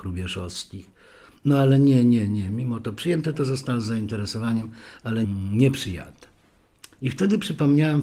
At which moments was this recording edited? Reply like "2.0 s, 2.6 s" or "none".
none